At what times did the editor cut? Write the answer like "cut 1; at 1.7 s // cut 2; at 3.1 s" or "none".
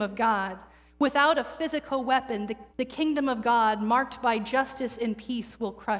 cut 1; at 2.7 s